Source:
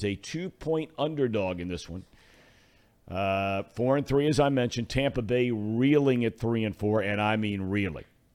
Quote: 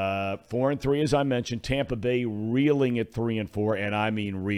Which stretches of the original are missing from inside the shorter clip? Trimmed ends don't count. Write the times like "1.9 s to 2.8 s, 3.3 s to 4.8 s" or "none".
none